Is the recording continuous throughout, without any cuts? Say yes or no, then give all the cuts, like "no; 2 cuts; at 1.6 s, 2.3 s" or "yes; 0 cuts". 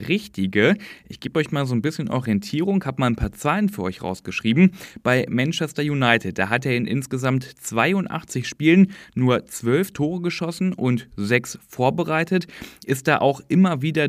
yes; 0 cuts